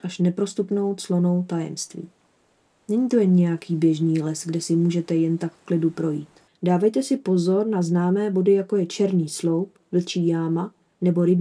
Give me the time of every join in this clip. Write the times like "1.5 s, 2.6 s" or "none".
6.5 s

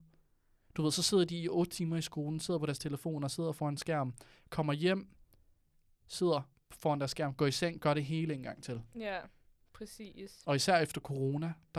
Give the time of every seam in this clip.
none

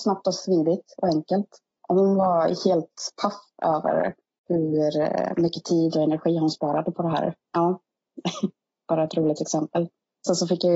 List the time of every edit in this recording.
7.4 s

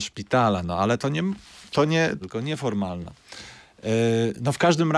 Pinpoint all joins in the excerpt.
1.0 s, 2.2 s

